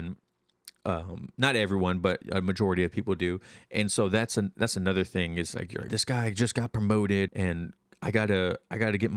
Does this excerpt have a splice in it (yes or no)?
yes